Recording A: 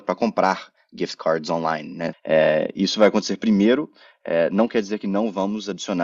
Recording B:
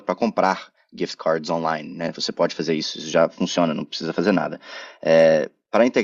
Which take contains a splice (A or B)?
A